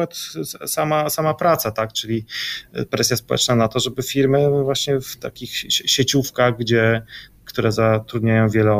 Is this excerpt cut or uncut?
uncut